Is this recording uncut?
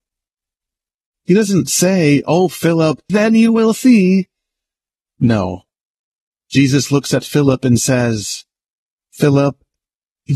no; 2 cuts; at 1.1 s, 3.1 s

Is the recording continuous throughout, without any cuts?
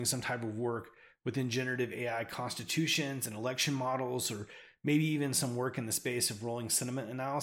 yes; 0 cuts

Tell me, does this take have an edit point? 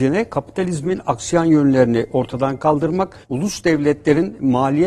yes; 1 cut; at 3.2 s

